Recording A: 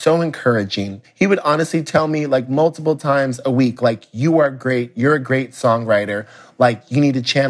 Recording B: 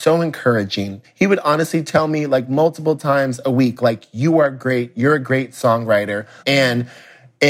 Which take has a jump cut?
B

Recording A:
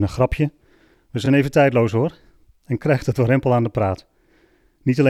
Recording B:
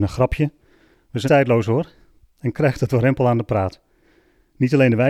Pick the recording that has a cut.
B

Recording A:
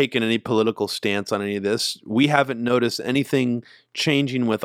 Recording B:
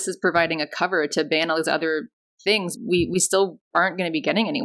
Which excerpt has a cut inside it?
B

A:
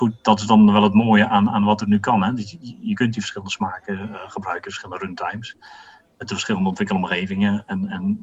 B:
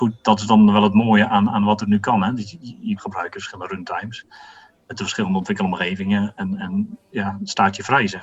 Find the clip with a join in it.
B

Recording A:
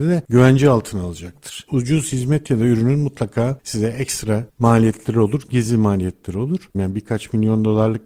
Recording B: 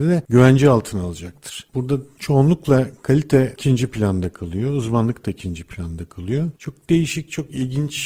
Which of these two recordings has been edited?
A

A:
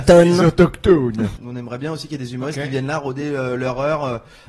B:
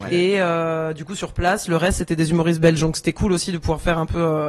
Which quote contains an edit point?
A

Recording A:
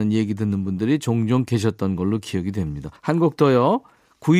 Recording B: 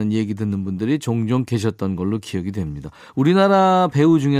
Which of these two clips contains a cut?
A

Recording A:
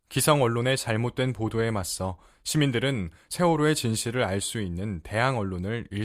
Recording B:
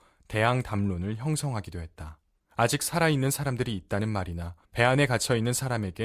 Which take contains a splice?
B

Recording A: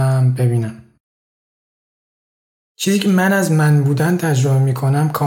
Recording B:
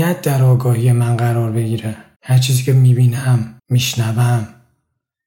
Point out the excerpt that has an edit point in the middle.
B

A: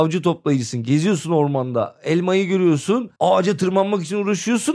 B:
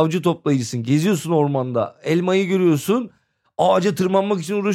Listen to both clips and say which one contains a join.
A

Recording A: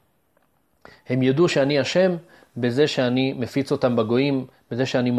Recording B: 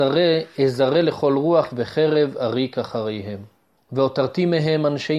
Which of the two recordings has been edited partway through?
B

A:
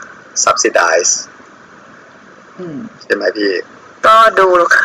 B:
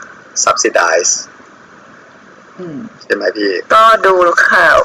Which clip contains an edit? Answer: B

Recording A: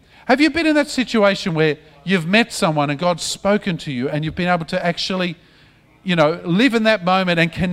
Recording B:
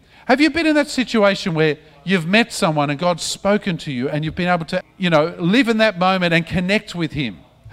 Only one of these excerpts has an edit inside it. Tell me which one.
B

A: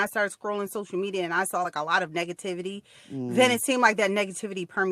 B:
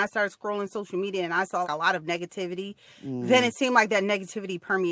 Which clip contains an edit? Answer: B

